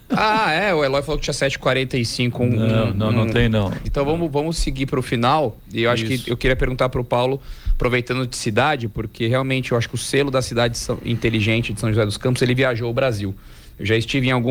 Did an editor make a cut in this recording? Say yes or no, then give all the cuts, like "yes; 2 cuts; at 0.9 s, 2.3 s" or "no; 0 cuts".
yes; 1 cut; at 3.9 s